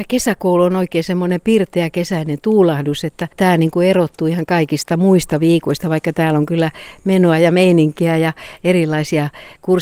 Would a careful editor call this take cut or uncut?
uncut